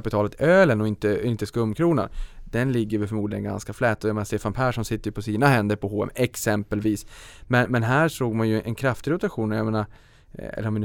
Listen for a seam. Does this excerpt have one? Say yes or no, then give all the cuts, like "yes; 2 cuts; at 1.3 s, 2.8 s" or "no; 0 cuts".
no; 0 cuts